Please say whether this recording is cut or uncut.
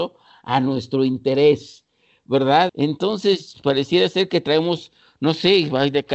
cut